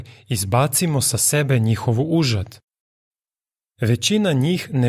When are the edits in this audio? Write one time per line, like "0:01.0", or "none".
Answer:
0:03.6